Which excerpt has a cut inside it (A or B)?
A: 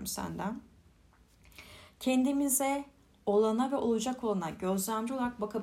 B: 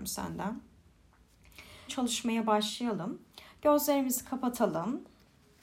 B